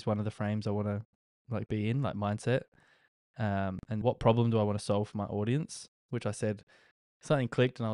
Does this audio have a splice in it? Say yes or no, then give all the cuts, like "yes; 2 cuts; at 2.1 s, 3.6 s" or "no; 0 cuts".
yes; 1 cut; at 4.0 s